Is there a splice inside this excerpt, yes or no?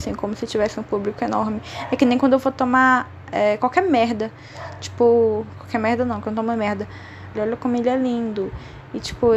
yes